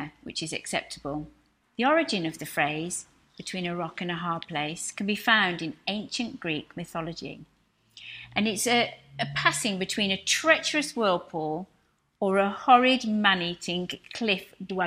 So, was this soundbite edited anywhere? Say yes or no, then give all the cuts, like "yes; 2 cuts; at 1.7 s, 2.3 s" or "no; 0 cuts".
no; 0 cuts